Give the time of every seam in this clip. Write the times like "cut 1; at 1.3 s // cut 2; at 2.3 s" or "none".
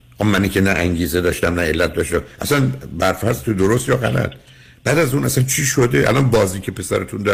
none

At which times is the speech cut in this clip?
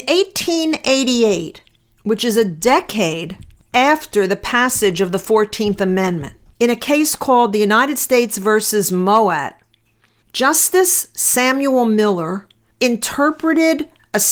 cut 1; at 6.5 s

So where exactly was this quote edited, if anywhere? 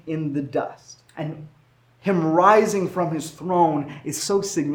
cut 1; at 1.1 s

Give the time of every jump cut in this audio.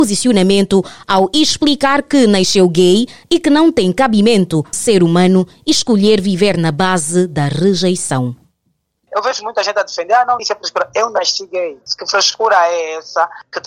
cut 1; at 4.7 s // cut 2; at 10.4 s

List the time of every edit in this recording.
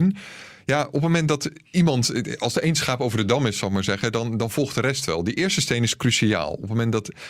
none

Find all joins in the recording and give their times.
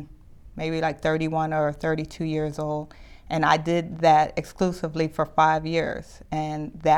none

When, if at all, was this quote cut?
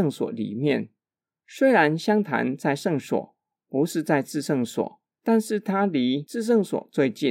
none

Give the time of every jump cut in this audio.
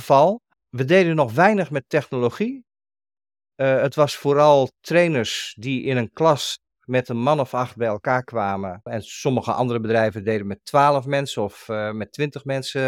cut 1; at 8.9 s

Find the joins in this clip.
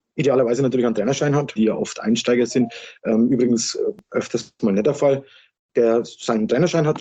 cut 1; at 1.6 s

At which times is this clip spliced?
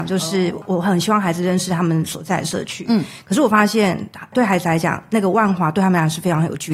none

